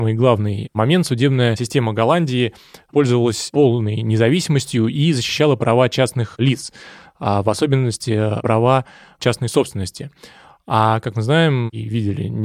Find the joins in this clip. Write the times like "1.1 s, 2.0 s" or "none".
none